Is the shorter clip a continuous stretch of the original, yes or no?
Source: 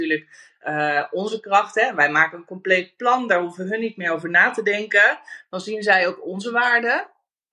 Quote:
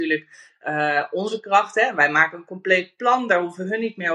yes